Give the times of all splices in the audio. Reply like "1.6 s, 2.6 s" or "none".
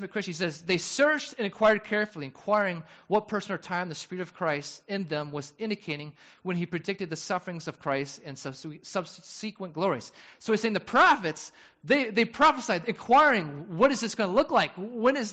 none